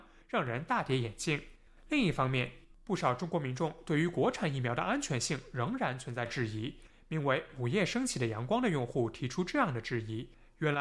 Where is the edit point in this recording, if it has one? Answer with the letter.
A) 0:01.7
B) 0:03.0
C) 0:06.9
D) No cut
C